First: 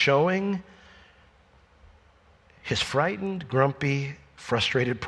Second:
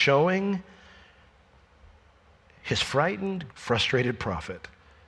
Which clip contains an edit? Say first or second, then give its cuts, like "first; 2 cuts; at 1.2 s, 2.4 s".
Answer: second; 1 cut; at 3.5 s